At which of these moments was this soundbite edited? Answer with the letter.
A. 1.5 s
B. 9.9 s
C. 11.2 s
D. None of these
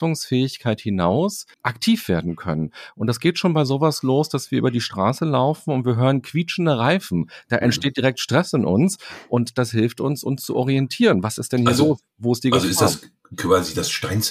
A